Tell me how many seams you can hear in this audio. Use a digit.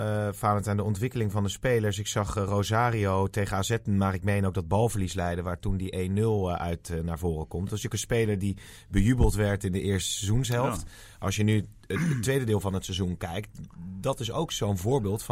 0